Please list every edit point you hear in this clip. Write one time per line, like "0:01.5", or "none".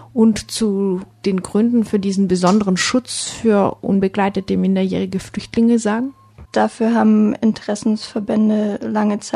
0:06.4